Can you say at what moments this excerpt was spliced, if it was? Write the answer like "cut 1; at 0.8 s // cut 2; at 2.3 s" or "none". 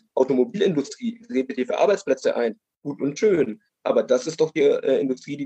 none